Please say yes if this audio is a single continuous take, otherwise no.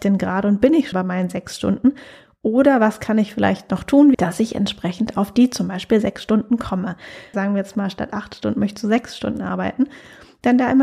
no